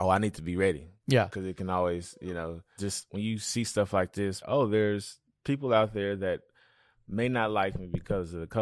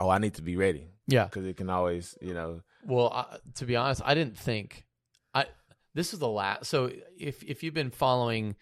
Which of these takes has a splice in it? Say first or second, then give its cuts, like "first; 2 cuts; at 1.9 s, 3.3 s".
first; 2 cuts; at 2.8 s, 4.4 s